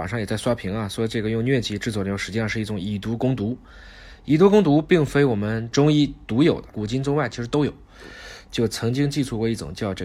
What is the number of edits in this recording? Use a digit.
1